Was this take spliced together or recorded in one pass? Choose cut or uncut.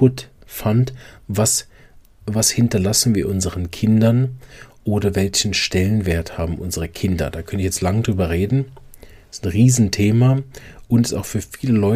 uncut